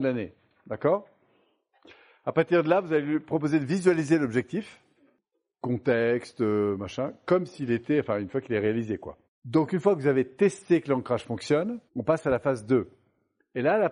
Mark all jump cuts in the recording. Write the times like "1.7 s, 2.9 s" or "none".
9.2 s, 11.9 s